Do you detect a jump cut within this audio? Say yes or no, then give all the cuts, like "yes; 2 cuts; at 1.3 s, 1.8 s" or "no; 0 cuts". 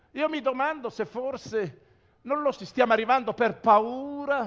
yes; 1 cut; at 2.5 s